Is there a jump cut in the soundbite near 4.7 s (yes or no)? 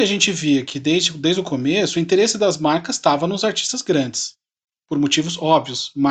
no